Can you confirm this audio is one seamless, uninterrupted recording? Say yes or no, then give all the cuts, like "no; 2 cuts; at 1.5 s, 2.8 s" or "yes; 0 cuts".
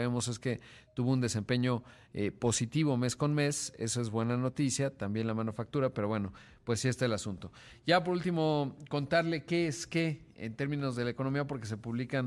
yes; 0 cuts